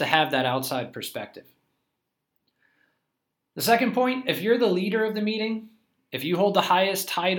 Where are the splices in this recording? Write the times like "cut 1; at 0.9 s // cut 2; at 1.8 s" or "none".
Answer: none